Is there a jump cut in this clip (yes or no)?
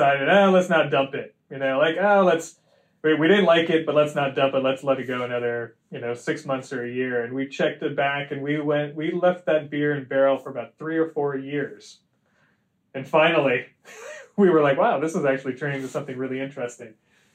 no